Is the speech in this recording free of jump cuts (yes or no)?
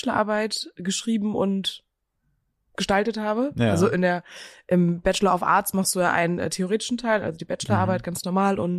yes